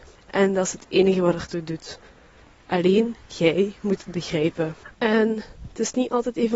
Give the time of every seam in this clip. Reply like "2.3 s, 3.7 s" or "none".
4.9 s